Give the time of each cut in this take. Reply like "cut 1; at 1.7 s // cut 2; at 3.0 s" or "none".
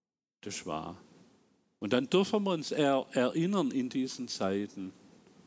cut 1; at 1.8 s

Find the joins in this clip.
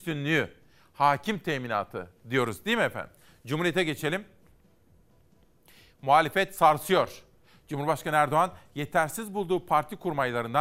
none

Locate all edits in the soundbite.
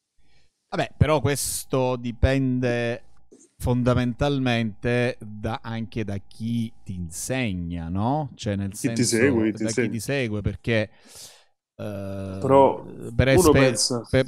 none

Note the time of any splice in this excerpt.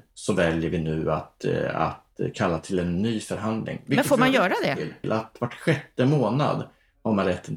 cut 1; at 5.0 s

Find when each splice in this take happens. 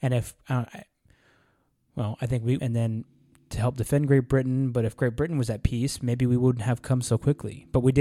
cut 1; at 2.6 s

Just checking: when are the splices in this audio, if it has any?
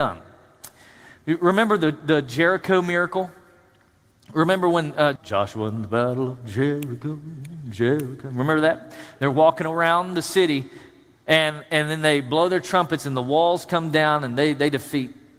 cut 1; at 5.2 s

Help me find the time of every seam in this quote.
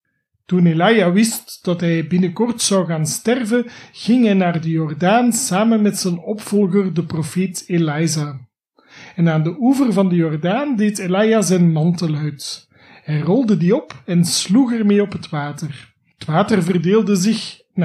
none

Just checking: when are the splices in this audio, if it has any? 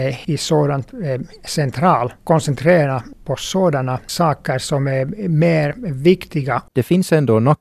cut 1; at 6.7 s

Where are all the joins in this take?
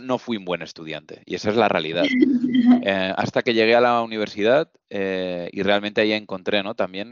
none

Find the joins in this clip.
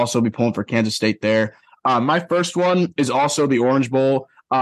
none

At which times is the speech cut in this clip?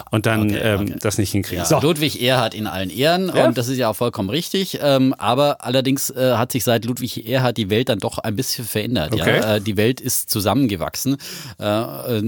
none

